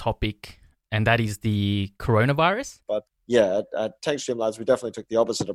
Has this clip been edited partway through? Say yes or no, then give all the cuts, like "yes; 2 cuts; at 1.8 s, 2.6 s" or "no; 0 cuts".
yes; 1 cut; at 2.8 s